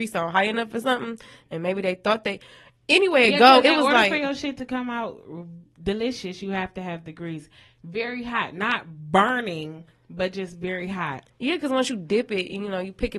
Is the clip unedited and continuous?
yes; 0 cuts

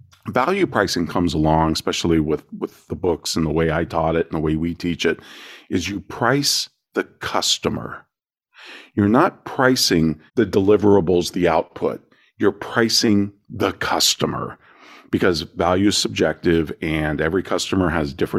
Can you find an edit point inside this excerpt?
yes; 1 cut; at 10.3 s

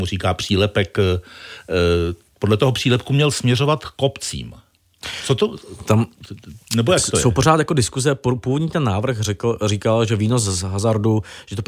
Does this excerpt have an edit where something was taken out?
no; 0 cuts

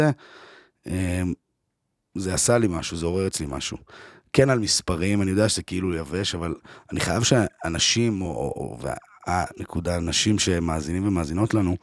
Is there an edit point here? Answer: no; 0 cuts

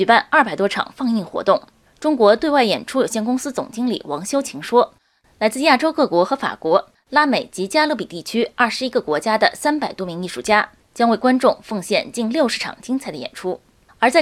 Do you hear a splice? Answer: yes; 1 cut; at 1.8 s

